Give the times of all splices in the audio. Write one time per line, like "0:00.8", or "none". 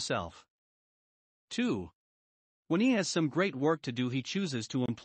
0:02.5